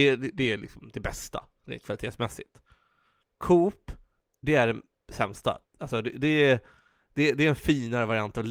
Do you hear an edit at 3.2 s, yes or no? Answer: yes